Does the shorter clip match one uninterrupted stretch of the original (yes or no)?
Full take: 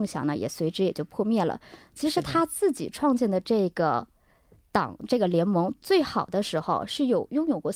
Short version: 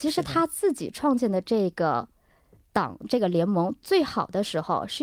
yes